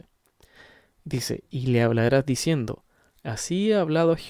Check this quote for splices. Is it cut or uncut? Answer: uncut